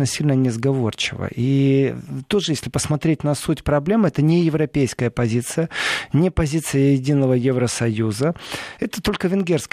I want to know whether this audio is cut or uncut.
uncut